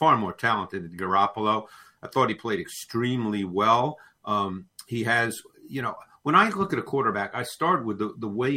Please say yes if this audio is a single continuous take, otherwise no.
yes